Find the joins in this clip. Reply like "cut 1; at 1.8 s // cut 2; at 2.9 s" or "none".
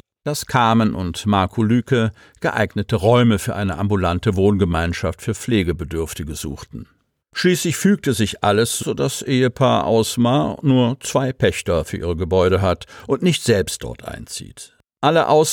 cut 1; at 7.2 s // cut 2; at 8.8 s